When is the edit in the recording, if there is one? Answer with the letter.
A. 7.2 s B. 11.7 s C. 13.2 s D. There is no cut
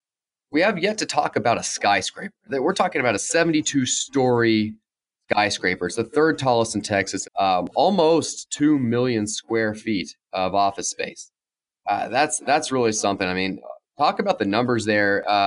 A